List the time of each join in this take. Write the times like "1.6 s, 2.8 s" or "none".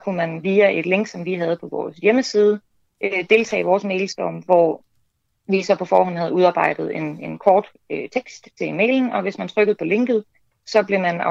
none

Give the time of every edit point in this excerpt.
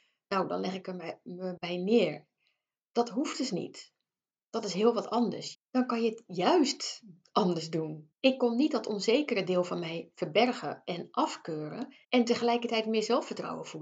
5.5 s, 8.1 s, 12.0 s

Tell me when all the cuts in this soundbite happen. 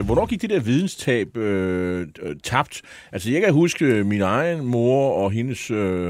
none

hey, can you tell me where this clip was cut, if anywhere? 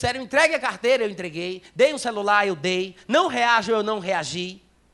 none

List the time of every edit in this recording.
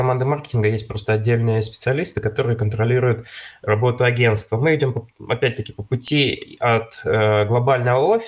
none

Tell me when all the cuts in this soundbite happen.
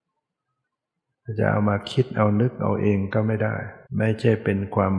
3.9 s

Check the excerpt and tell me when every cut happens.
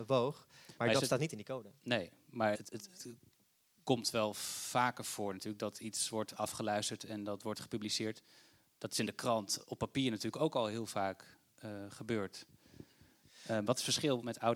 2.5 s

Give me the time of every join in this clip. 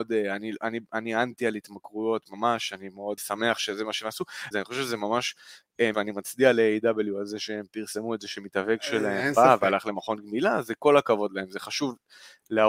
3.2 s, 4.5 s, 5.9 s

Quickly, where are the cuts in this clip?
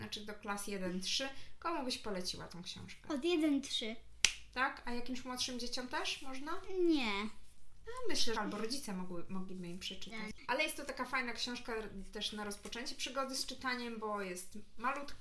8.3 s

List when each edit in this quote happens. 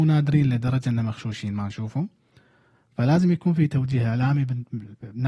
none

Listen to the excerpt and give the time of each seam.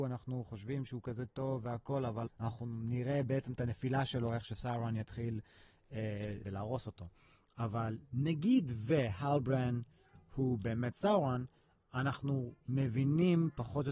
2.3 s, 6.4 s

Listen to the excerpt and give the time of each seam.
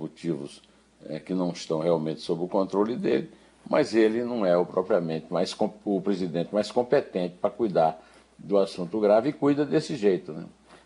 none

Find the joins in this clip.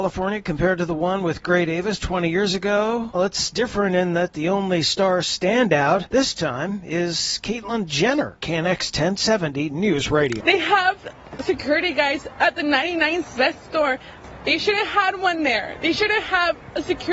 3.1 s, 8.4 s, 10.4 s

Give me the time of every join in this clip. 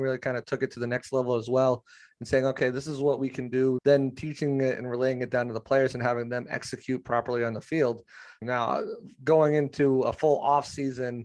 3.8 s, 8.4 s

